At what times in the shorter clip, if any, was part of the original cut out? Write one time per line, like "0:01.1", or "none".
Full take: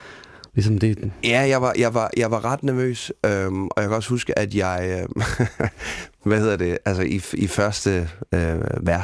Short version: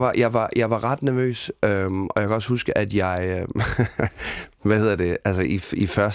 none